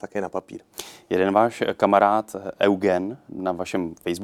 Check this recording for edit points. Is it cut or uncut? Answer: uncut